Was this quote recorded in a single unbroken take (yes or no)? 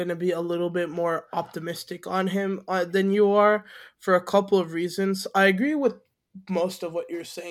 yes